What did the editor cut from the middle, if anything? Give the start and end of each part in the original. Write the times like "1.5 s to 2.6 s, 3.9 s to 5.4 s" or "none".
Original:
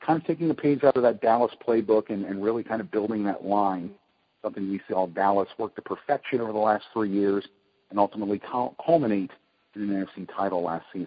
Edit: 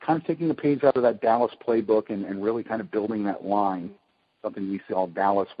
none